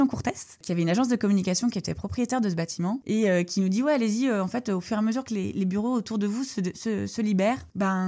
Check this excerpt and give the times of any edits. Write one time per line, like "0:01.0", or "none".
none